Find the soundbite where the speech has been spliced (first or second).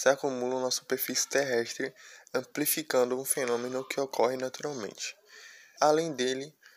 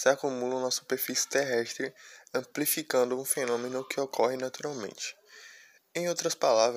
first